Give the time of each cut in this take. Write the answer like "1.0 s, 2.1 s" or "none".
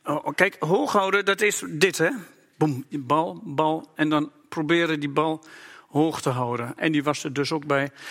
6.8 s